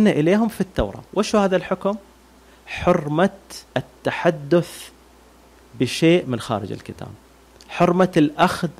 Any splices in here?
yes; 2 cuts; at 1.1 s, 3.7 s

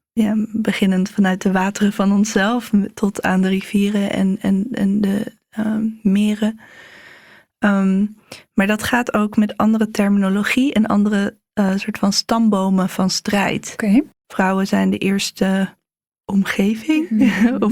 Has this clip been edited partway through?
yes; 1 cut; at 14.2 s

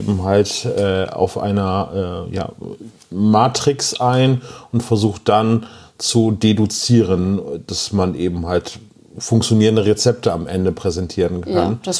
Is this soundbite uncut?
yes; 0 cuts

